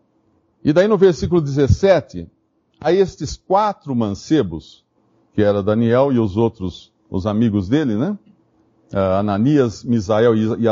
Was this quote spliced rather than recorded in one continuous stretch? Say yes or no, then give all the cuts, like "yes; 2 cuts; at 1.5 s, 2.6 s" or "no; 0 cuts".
yes; 1 cut; at 2.7 s